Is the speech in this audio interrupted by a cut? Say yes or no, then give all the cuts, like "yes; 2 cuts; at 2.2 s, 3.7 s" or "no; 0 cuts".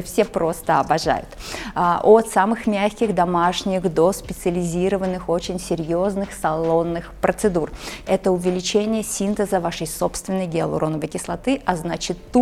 yes; 1 cut; at 8.0 s